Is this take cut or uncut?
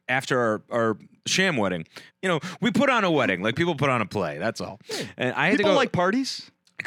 cut